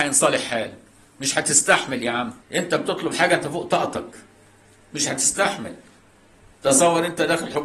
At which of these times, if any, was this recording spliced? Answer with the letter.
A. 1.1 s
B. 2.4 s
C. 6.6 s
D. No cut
B